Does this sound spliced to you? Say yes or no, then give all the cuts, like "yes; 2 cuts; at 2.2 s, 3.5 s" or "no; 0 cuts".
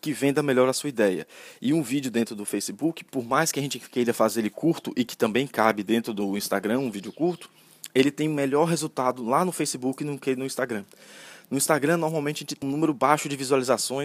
yes; 1 cut; at 12.6 s